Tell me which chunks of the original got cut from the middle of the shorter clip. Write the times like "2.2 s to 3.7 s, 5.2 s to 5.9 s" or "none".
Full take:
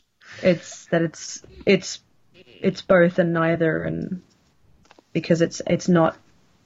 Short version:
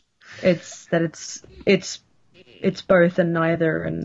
none